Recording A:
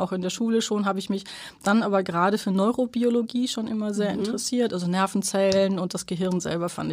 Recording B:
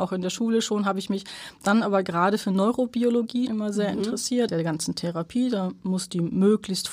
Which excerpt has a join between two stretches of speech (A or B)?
B